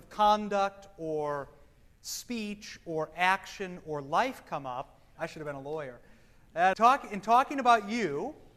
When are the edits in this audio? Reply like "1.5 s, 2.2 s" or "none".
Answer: 5.2 s, 6.7 s